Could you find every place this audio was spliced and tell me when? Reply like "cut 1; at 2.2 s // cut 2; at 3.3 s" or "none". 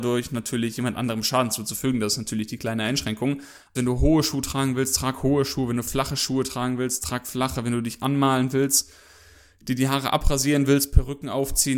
cut 1; at 3.8 s